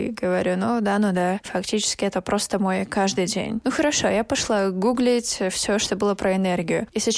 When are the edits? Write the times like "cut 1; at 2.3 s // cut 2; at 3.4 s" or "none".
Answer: none